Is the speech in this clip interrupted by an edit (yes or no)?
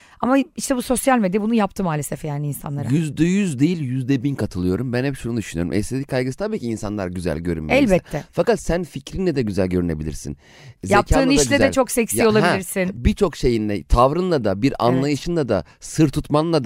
no